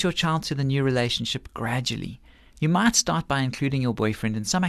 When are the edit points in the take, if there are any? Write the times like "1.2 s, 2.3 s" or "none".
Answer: 2.5 s